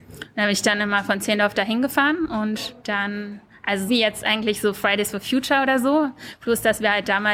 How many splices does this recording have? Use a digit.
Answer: 2